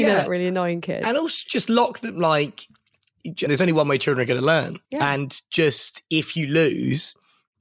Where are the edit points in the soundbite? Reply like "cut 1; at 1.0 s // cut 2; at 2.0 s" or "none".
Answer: cut 1; at 3.5 s // cut 2; at 4.8 s